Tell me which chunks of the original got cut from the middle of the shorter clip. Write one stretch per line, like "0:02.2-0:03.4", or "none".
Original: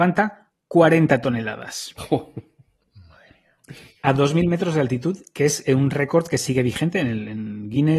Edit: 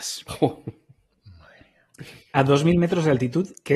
none

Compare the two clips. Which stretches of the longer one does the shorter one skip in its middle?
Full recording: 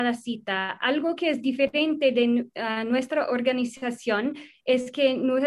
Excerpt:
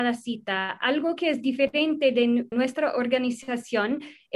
0:02.5-0:02.9

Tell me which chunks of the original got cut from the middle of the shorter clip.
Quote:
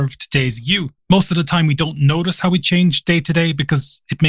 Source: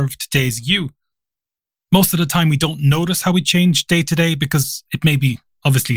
0:01.0-0:01.8

